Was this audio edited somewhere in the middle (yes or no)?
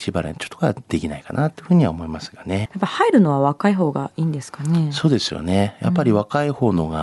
yes